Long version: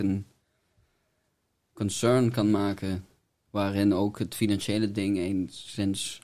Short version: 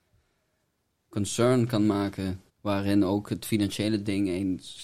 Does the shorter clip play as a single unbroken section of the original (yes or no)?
no